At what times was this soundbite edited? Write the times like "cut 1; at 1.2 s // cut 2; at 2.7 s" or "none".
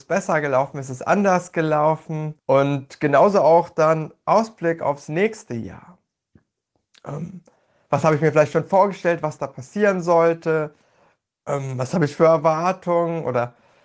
cut 1; at 2.4 s